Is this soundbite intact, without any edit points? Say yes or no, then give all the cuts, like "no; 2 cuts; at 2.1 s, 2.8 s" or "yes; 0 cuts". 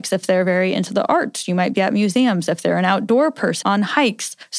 no; 1 cut; at 3.6 s